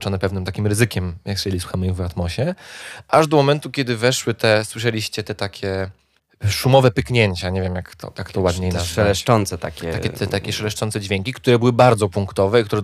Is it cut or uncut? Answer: uncut